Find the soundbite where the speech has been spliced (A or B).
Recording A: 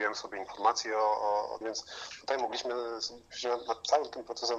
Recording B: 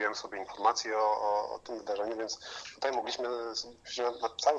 A